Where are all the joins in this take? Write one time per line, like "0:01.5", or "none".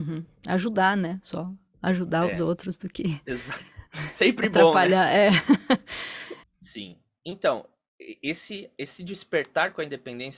0:06.4